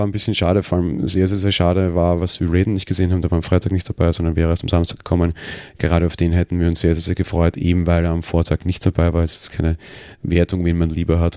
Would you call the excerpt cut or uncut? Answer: uncut